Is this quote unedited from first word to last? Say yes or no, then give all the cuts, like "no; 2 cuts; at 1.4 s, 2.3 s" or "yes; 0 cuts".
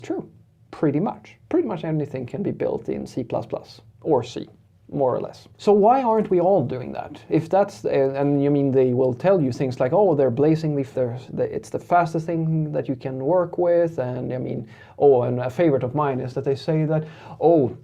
no; 2 cuts; at 5.5 s, 10.9 s